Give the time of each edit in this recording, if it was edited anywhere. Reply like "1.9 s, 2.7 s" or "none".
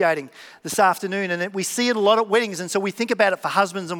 none